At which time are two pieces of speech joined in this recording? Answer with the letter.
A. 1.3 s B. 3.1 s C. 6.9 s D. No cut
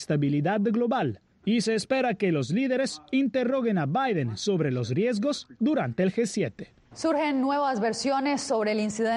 C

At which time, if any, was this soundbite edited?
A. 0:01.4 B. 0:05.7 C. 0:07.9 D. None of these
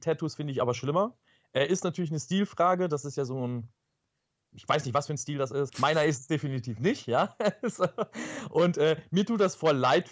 B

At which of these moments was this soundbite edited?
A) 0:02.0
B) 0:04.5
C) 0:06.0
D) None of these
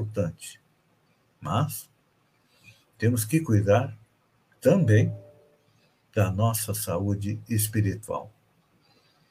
D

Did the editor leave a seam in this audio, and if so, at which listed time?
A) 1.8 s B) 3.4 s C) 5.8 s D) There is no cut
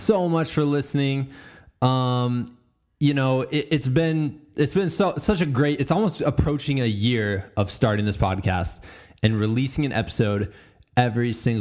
D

